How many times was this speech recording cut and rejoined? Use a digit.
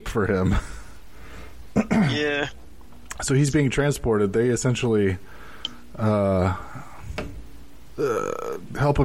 0